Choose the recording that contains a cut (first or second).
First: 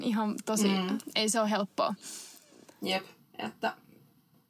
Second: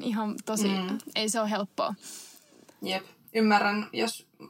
second